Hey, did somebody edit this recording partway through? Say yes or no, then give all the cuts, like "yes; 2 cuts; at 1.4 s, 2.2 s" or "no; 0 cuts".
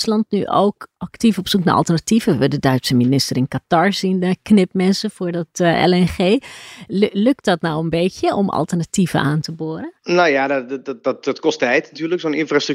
no; 0 cuts